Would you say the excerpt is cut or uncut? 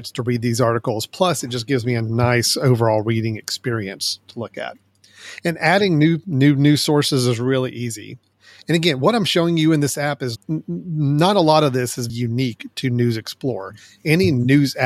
cut